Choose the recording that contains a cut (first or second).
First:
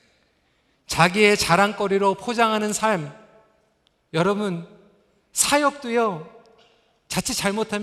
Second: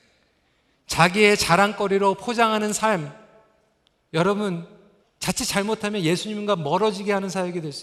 second